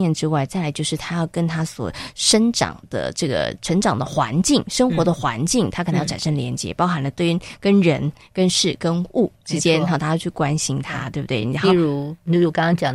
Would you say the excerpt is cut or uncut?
uncut